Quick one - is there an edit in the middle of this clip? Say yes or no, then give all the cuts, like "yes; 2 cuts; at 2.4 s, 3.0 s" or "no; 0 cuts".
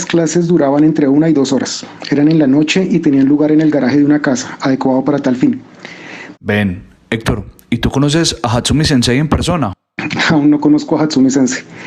yes; 1 cut; at 6.3 s